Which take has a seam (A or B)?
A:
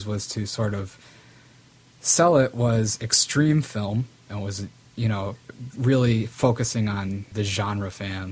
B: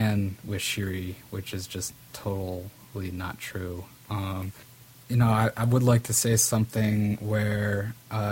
A